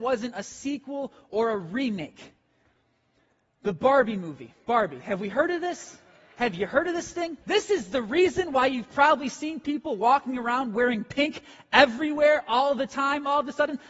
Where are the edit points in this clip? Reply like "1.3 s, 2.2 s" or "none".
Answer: 7.4 s